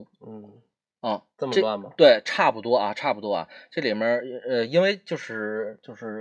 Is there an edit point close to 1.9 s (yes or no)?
no